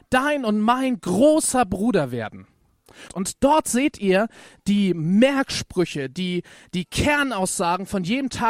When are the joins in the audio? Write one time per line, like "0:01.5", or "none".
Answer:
0:03.1